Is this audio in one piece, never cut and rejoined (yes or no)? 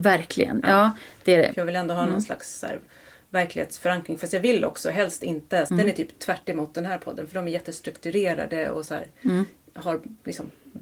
no